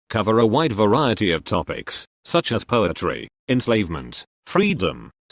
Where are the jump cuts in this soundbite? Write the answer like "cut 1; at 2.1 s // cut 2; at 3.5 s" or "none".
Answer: cut 1; at 3.4 s